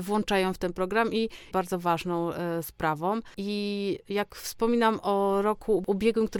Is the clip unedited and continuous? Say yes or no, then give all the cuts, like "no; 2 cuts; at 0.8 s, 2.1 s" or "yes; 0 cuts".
no; 1 cut; at 1.5 s